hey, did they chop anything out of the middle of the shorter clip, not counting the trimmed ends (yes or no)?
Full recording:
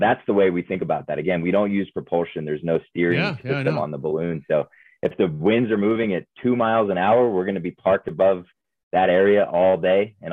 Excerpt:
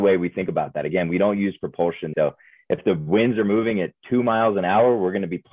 yes